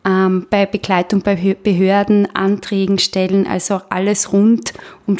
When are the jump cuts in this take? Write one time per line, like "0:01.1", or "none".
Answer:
none